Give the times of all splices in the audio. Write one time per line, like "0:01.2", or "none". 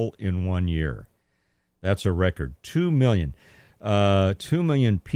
none